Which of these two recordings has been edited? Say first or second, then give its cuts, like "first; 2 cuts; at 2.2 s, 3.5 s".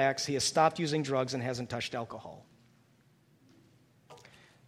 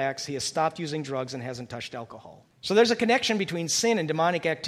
second; 1 cut; at 2.5 s